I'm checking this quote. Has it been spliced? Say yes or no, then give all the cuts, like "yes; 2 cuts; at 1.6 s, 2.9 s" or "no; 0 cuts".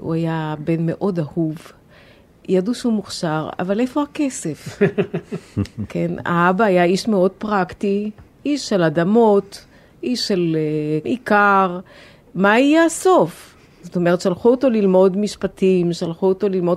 yes; 1 cut; at 11.0 s